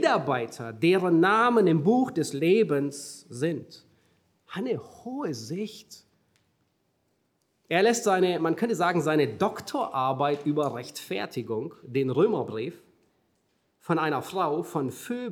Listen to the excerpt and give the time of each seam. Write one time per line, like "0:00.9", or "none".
none